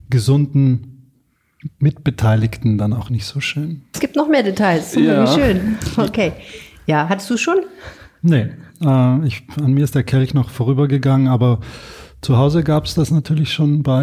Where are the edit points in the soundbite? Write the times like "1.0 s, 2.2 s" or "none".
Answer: 3.9 s